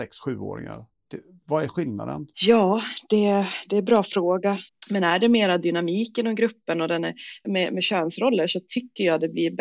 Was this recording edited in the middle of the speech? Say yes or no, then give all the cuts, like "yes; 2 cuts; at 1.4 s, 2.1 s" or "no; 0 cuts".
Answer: yes; 3 cuts; at 2.3 s, 4.7 s, 7.4 s